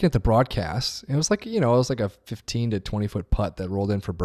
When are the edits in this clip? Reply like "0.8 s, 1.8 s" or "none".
none